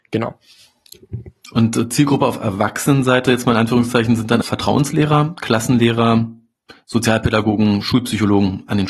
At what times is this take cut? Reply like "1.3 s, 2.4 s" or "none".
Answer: 4.4 s